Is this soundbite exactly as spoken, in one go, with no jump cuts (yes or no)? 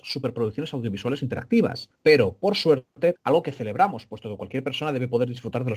no